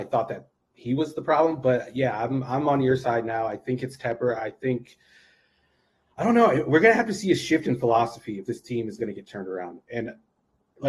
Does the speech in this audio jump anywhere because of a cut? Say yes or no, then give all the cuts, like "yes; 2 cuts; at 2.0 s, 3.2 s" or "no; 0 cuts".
no; 0 cuts